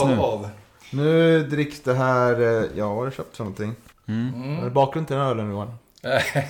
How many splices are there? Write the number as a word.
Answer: one